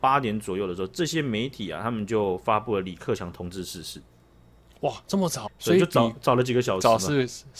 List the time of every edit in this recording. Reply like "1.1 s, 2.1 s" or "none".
5.5 s